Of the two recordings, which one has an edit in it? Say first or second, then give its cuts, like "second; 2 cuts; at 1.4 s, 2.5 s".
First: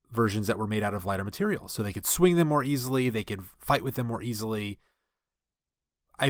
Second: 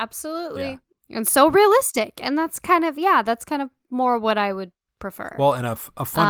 second; 1 cut; at 0.9 s